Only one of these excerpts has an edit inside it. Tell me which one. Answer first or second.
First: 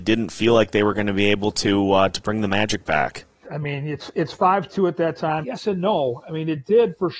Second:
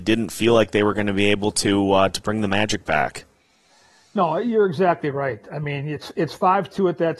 first